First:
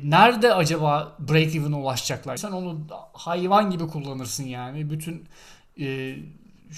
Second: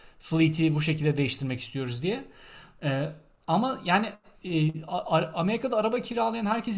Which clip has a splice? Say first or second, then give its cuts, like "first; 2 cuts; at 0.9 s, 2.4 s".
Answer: first; 1 cut; at 2.4 s